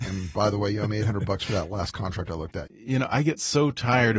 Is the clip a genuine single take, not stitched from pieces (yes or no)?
no